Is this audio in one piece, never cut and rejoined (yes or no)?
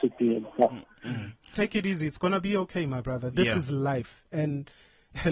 yes